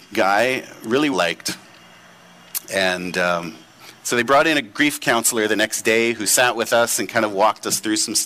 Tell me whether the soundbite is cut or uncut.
cut